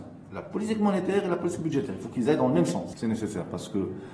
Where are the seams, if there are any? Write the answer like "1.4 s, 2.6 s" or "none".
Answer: 2.9 s